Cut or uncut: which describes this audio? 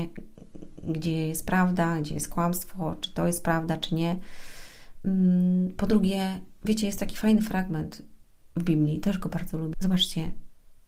cut